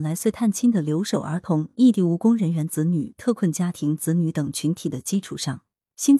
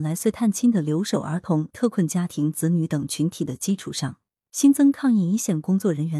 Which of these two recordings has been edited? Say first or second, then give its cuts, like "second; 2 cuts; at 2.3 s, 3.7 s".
second; 1 cut; at 1.7 s